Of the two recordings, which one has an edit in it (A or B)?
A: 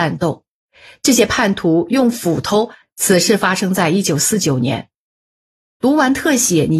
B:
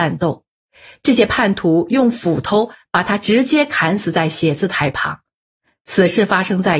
A